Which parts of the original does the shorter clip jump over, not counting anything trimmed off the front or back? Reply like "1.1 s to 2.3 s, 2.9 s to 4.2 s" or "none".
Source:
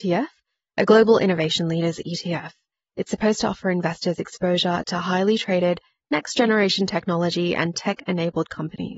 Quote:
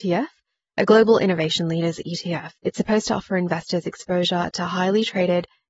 2.6 s to 2.9 s

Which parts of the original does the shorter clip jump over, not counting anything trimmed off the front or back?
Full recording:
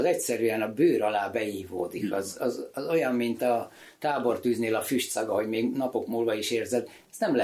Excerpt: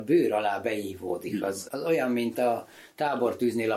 2.4 s to 2.7 s

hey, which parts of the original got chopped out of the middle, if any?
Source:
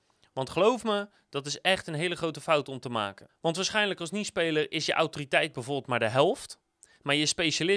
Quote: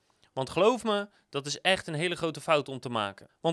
none

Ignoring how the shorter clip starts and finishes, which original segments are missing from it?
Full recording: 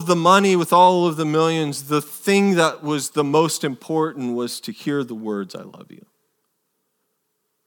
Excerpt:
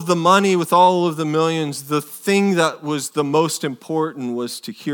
none

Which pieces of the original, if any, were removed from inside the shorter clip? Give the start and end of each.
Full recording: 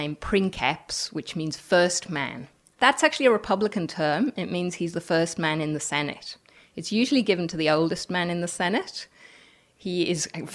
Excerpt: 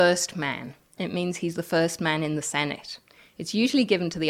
2.7 s to 4.3 s

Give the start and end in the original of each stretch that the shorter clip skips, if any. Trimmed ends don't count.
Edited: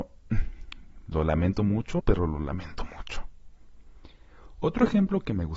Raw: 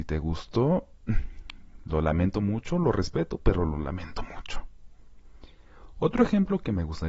2.8 s to 3.4 s

